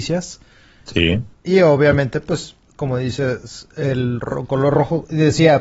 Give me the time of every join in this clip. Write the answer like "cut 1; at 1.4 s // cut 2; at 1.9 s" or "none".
cut 1; at 1.3 s // cut 2; at 2.6 s